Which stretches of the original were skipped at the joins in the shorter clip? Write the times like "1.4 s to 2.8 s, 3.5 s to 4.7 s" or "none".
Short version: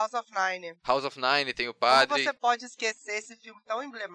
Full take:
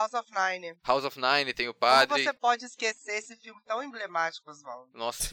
none